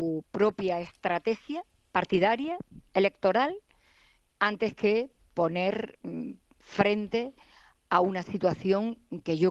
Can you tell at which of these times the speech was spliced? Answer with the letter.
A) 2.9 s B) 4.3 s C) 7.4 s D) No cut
B